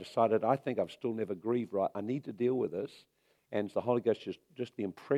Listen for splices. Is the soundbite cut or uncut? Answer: uncut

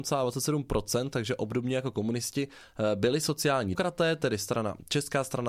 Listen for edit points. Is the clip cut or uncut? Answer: cut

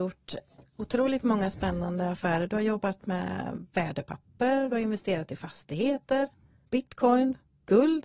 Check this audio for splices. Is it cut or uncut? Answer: uncut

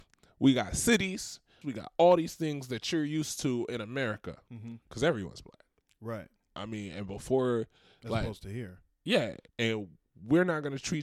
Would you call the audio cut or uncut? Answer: cut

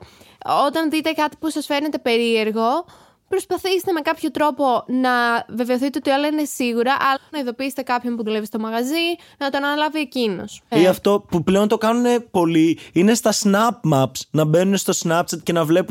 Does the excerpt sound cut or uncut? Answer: cut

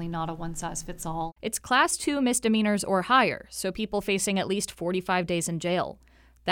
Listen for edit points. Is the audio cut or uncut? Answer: cut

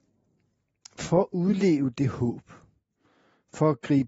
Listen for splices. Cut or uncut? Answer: uncut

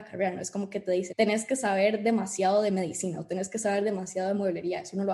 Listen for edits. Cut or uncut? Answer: cut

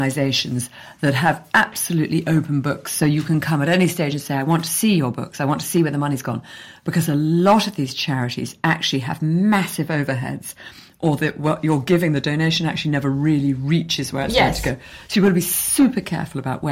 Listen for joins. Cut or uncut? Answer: uncut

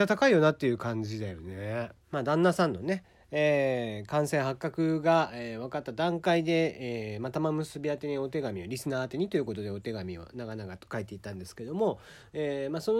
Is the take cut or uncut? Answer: cut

